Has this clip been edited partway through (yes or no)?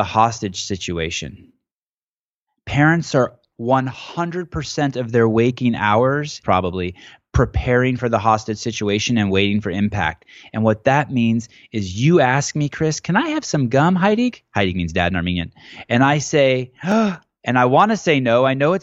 yes